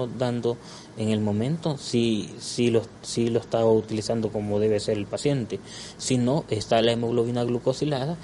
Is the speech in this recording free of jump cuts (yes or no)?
yes